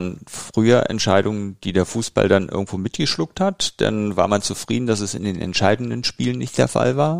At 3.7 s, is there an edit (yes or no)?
no